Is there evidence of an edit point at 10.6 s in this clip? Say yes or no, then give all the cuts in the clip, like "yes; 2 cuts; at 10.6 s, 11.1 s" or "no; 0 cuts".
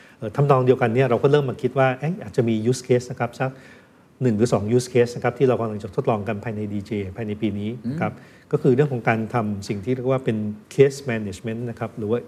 yes; 1 cut; at 10.6 s